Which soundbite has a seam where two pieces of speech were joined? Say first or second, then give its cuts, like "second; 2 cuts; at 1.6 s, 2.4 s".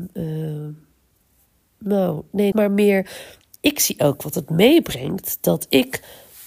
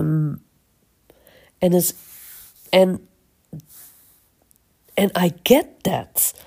first; 1 cut; at 2.5 s